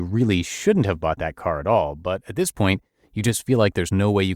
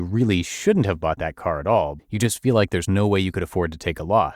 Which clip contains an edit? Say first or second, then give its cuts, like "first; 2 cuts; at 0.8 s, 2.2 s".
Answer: second; 1 cut; at 2.0 s